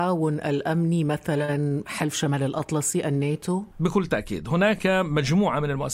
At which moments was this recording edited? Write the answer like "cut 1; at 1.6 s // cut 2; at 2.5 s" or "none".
cut 1; at 3.7 s